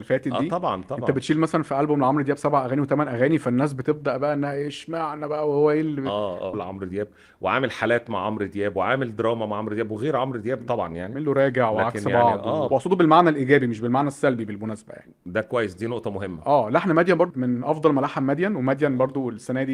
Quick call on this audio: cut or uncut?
cut